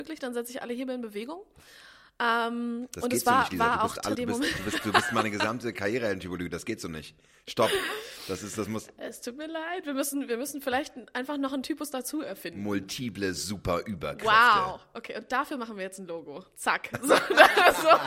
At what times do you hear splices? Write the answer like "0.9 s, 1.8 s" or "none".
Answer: 4.1 s